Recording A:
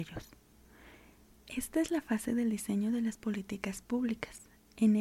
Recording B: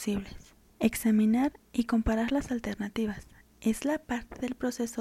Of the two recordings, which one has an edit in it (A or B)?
A